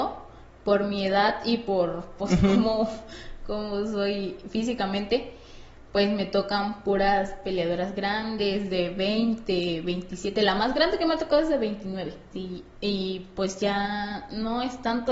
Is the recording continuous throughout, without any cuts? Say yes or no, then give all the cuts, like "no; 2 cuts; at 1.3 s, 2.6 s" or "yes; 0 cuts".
no; 1 cut; at 12.3 s